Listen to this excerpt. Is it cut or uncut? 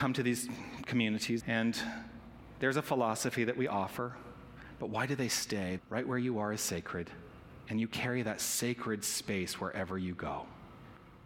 cut